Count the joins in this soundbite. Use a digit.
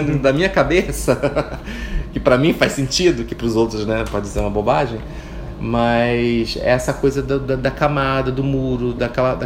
0